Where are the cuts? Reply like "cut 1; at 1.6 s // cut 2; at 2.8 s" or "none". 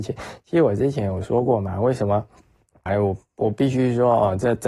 cut 1; at 2.9 s